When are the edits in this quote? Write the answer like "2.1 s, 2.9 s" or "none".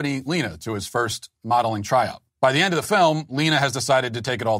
2.3 s